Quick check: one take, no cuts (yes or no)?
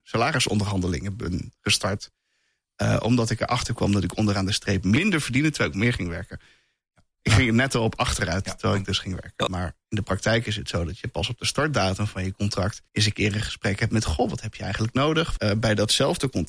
no